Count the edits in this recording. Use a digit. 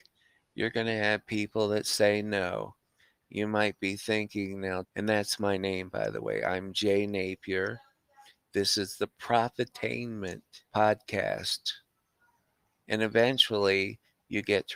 3